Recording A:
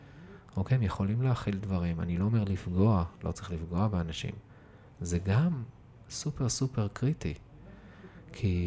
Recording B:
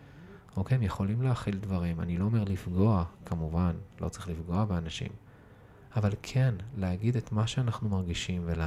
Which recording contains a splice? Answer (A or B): A